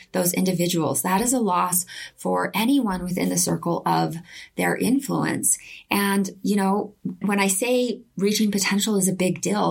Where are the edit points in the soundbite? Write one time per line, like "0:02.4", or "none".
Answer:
0:07.2

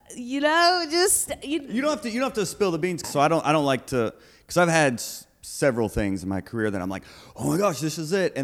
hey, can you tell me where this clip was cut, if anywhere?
0:03.0

